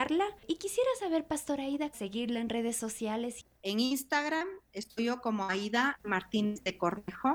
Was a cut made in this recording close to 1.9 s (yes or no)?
yes